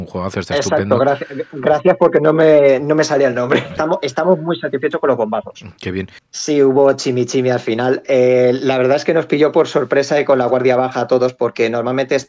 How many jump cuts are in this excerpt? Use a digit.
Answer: 2